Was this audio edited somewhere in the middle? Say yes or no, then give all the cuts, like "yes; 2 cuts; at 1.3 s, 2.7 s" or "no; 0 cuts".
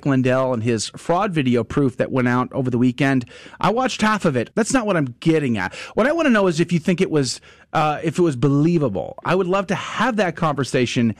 yes; 1 cut; at 4.5 s